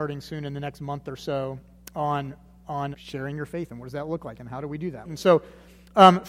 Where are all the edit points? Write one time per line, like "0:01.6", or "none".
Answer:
0:02.9
0:05.0